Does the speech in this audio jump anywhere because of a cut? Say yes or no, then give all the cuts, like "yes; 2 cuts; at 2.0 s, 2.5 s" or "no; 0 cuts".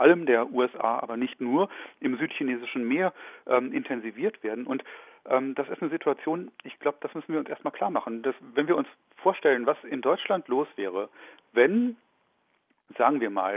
no; 0 cuts